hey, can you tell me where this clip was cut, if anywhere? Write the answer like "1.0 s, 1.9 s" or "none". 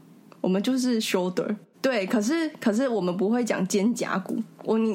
1.7 s